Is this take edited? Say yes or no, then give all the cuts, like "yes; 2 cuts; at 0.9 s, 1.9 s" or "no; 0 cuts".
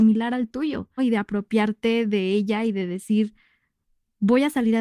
yes; 1 cut; at 1.0 s